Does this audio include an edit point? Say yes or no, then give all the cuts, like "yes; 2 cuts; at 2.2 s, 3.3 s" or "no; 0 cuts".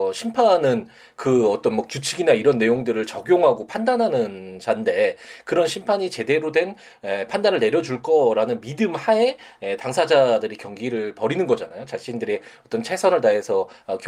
no; 0 cuts